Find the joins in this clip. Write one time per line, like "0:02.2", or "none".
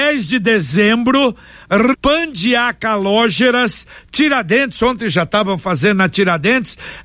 0:01.9